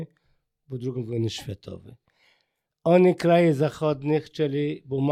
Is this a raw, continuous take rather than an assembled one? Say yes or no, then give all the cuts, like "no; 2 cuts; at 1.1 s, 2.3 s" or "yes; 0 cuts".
yes; 0 cuts